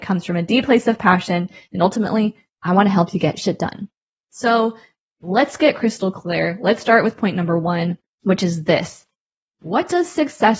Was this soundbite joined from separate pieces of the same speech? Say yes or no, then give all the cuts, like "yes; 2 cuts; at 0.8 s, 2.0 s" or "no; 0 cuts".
no; 0 cuts